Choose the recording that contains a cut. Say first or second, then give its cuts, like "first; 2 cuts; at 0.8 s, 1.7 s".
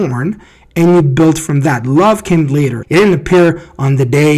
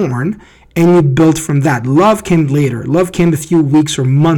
first; 1 cut; at 2.8 s